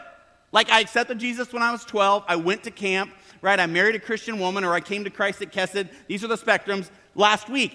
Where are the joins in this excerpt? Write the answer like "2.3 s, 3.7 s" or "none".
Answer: none